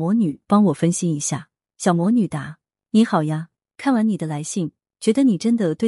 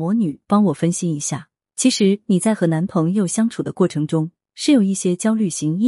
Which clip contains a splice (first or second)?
second